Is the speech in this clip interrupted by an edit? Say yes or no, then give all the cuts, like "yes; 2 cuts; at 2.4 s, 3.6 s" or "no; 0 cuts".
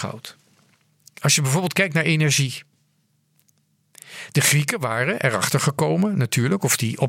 no; 0 cuts